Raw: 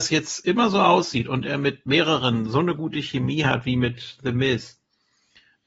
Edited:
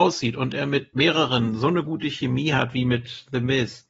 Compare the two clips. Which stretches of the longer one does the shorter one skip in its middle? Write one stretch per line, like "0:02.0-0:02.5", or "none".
none